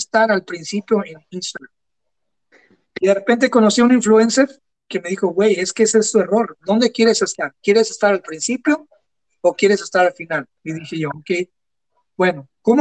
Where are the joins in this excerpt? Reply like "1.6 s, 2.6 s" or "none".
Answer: 1.9 s, 6.6 s, 10.6 s